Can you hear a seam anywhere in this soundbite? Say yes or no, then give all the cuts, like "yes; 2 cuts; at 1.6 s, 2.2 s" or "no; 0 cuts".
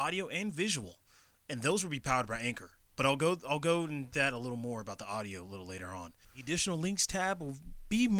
yes; 1 cut; at 6.2 s